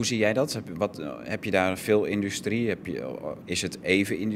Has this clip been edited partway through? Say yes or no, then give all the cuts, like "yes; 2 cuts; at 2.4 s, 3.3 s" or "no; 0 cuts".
yes; 1 cut; at 3.4 s